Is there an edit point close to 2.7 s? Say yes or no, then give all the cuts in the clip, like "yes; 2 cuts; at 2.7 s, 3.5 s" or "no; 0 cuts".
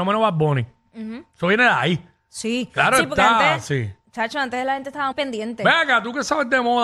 no; 1 cut; at 5.1 s